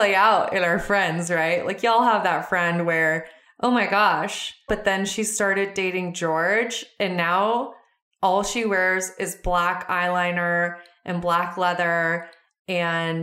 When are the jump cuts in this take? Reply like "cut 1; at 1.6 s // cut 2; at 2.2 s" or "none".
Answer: cut 1; at 4.7 s

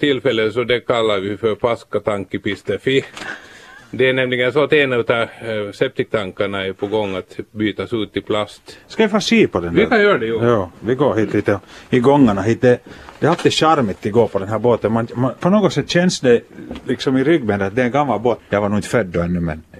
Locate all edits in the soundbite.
cut 1; at 15.4 s // cut 2; at 18.4 s

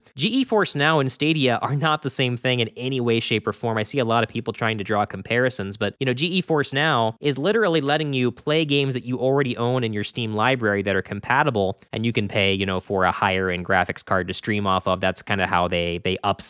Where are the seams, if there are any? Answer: none

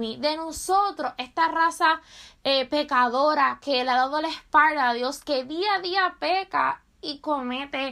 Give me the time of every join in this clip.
cut 1; at 5.2 s

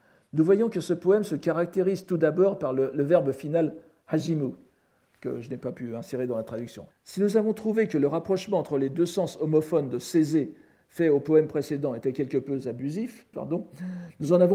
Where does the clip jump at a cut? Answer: cut 1; at 6.9 s // cut 2; at 13.3 s

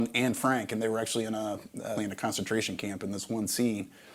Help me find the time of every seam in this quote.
cut 1; at 2.0 s

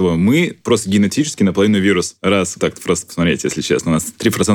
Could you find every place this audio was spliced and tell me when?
cut 1; at 2.6 s

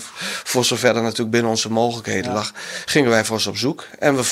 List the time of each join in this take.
none

